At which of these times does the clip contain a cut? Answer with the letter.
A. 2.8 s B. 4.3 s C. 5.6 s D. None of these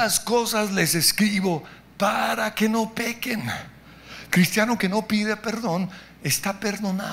B